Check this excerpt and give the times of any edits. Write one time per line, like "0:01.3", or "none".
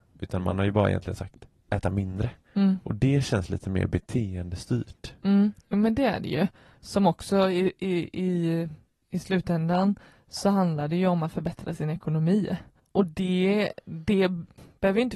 none